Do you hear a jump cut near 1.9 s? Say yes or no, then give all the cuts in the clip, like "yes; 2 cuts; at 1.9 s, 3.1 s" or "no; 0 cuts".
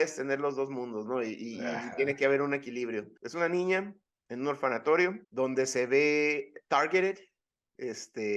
no; 2 cuts; at 3.2 s, 5.2 s